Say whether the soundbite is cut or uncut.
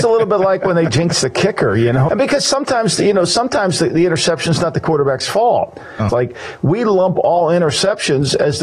cut